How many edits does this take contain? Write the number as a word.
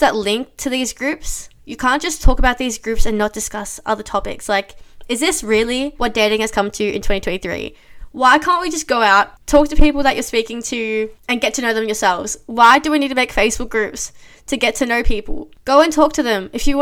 zero